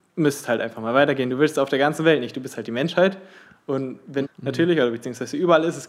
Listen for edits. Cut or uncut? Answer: cut